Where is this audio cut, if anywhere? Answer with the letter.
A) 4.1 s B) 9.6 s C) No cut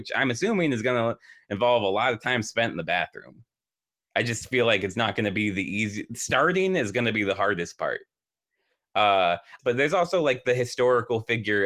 B